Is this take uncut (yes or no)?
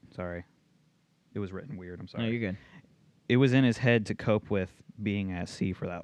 yes